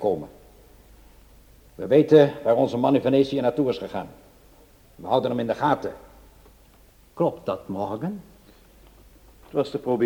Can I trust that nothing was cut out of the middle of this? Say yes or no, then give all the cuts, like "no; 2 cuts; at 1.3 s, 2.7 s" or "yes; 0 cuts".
no; 2 cuts; at 1.6 s, 4.8 s